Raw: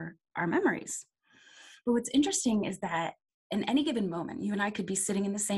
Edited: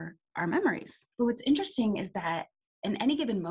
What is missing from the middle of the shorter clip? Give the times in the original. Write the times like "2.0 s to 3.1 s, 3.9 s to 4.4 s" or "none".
1.1 s to 1.8 s